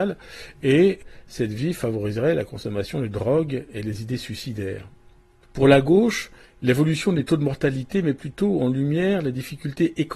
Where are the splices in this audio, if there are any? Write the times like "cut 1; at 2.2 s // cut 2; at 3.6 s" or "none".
none